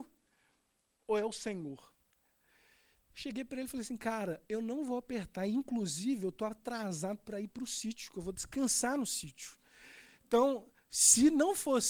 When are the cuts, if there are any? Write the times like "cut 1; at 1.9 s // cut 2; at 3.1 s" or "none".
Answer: none